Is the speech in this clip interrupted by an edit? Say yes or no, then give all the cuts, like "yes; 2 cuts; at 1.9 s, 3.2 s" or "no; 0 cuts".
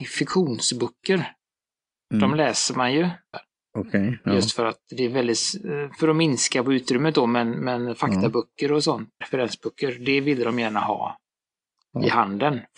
yes; 2 cuts; at 3.3 s, 9.2 s